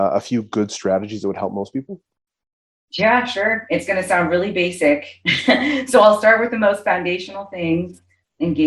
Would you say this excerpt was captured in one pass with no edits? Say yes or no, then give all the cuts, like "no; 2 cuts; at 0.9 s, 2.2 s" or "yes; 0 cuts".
yes; 0 cuts